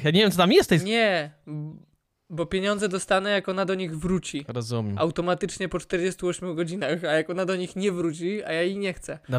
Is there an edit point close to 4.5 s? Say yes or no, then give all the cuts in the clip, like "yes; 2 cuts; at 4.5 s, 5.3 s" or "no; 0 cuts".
no; 0 cuts